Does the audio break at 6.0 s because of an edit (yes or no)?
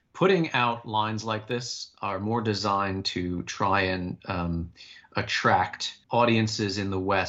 yes